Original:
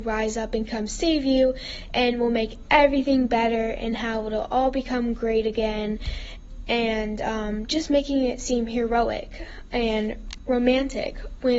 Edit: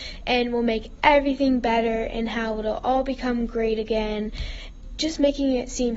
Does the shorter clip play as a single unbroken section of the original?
no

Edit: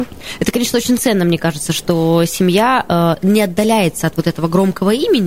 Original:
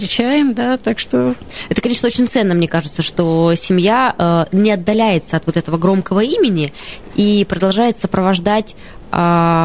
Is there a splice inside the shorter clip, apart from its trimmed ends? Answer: no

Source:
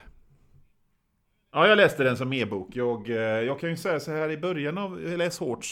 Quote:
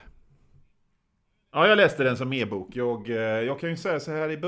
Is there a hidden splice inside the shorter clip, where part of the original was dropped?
no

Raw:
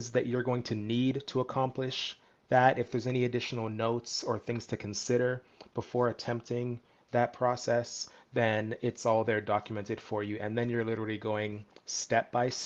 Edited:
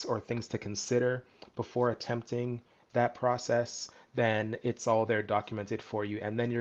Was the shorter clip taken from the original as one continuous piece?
yes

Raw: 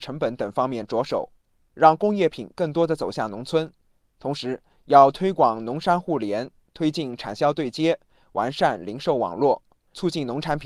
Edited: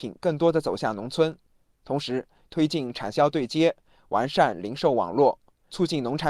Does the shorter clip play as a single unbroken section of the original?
no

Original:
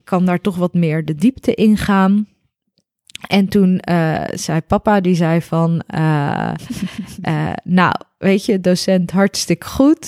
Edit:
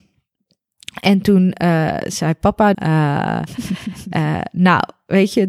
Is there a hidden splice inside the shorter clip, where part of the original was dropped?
yes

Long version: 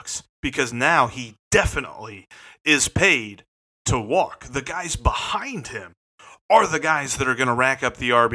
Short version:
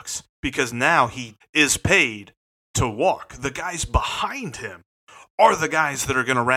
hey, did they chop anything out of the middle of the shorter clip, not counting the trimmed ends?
yes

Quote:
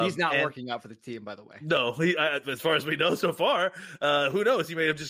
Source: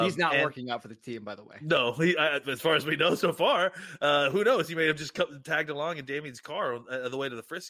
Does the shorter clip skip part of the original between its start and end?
no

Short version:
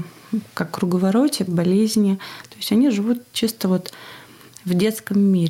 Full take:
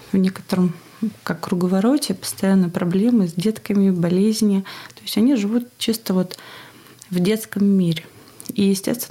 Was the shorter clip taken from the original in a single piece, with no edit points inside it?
no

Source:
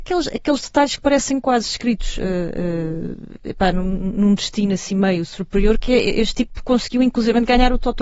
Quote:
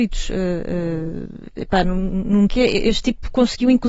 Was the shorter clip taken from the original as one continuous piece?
no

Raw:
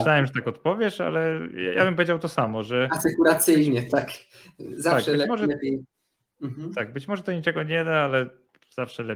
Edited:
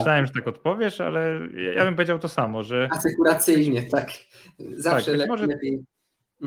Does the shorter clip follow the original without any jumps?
yes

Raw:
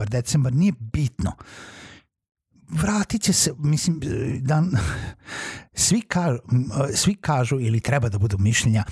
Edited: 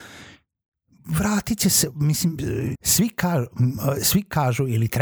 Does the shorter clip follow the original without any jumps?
no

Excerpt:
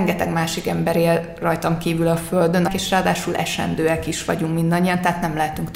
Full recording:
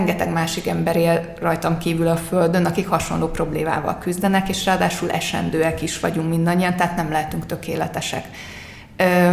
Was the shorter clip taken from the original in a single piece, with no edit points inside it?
no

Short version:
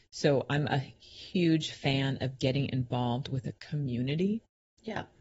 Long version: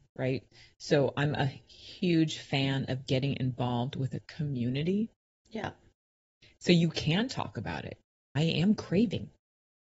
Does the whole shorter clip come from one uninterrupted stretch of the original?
yes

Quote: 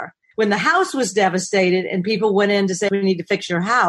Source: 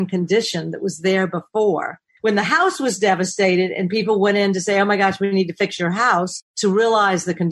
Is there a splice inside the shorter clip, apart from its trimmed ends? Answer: yes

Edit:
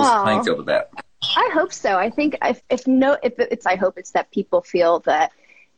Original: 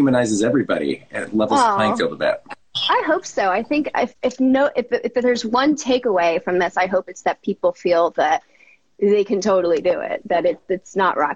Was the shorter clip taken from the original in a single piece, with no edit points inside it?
no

